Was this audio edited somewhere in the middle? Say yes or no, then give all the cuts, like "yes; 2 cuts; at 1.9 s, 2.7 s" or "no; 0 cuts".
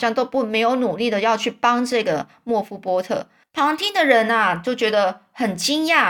yes; 1 cut; at 3.4 s